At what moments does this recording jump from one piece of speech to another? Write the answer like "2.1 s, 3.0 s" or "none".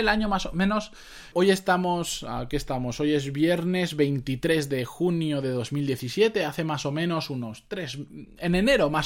1.3 s